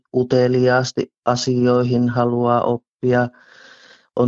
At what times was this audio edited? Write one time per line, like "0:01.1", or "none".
none